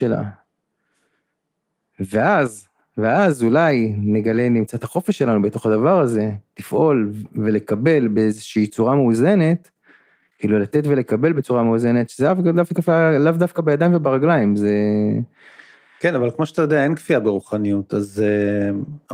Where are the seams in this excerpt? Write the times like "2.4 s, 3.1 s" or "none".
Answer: none